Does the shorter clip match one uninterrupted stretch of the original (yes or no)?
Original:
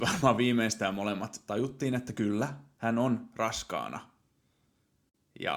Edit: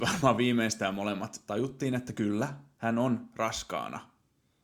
yes